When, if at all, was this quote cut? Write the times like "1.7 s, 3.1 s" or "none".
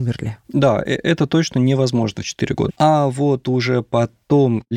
2.7 s